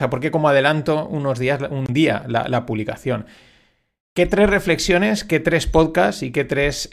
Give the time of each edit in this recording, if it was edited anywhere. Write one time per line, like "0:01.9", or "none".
none